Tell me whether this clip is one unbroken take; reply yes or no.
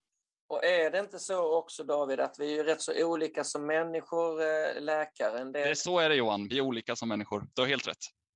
yes